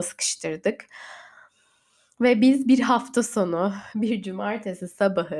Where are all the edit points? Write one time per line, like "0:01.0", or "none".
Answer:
none